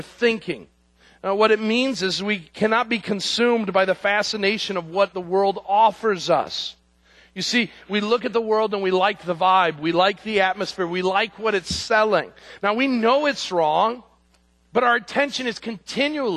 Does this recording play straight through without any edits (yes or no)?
yes